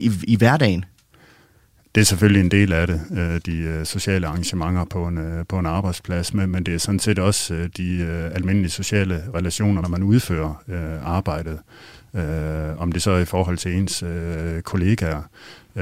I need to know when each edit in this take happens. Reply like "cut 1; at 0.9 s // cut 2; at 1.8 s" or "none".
cut 1; at 9.8 s